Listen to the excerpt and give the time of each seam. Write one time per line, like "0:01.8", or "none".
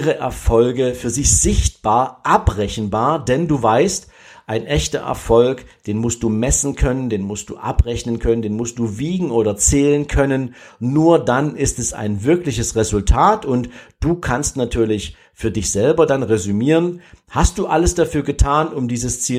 none